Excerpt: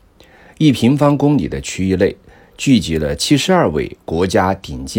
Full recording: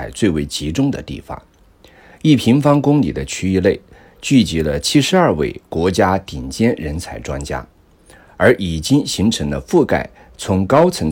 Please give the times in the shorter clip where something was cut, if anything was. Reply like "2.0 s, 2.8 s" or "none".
none